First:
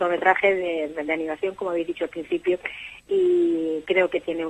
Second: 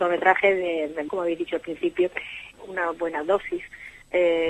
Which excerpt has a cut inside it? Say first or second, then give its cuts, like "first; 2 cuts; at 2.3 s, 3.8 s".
second; 2 cuts; at 1.1 s, 2.5 s